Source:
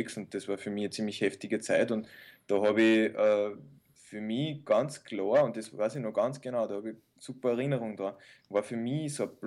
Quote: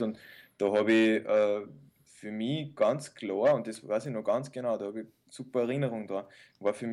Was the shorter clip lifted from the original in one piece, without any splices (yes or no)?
yes